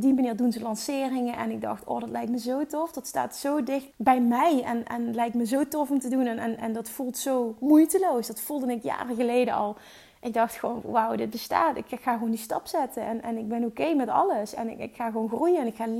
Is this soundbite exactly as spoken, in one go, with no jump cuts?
no; 1 cut; at 3.9 s

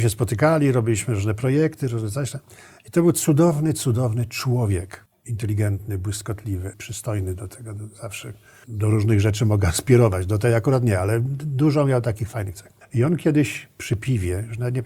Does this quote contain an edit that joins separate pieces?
yes; 1 cut; at 6.7 s

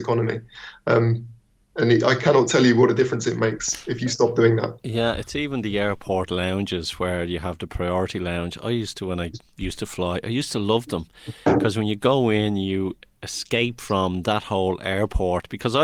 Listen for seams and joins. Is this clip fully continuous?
yes; 0 cuts

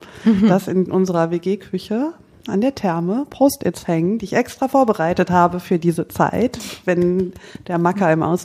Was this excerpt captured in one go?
yes; 0 cuts

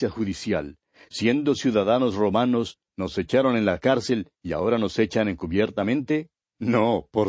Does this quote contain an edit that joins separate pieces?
yes; 2 cuts; at 2.9 s, 4.3 s

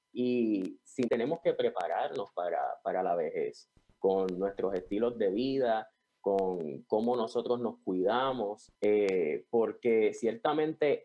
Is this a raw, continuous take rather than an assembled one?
no; 2 cuts; at 1.1 s, 8.8 s

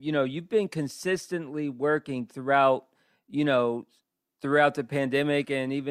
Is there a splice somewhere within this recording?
no; 0 cuts

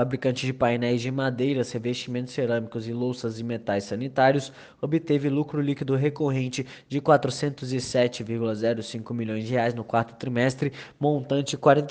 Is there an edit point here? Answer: no; 0 cuts

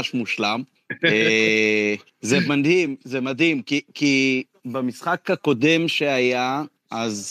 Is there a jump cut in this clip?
no; 0 cuts

